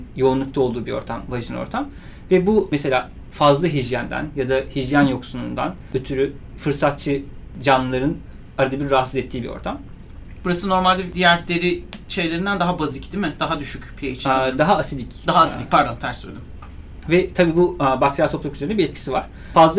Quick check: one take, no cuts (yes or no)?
yes